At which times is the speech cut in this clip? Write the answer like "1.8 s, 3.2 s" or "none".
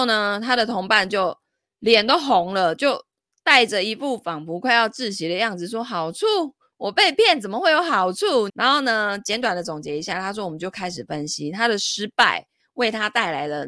8.5 s